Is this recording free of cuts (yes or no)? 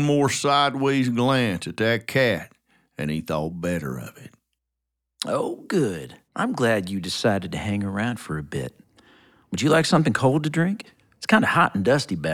no